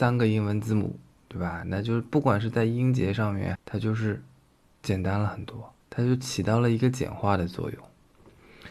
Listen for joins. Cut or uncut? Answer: cut